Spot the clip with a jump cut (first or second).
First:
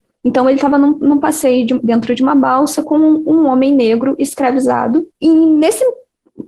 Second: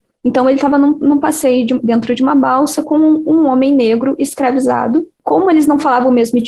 first